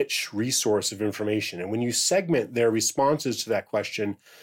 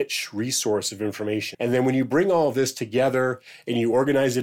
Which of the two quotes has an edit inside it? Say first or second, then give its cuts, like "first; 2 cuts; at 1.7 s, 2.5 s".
second; 1 cut; at 1.5 s